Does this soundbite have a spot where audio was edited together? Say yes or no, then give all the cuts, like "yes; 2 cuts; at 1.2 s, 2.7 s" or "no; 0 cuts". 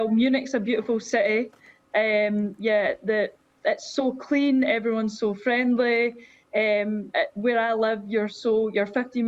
no; 0 cuts